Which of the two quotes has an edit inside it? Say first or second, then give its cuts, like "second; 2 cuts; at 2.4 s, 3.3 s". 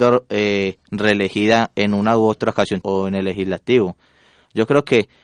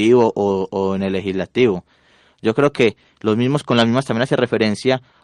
first; 1 cut; at 2.8 s